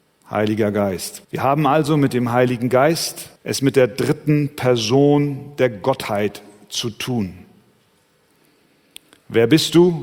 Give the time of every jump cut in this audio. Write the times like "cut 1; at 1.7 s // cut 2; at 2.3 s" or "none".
cut 1; at 1.2 s // cut 2; at 3.4 s